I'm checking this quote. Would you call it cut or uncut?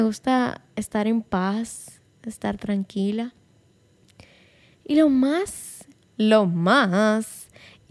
uncut